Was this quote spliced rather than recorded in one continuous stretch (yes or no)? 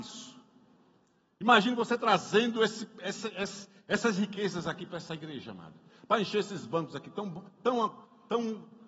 no